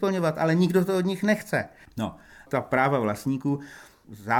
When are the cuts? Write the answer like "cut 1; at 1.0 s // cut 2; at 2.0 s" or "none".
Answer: none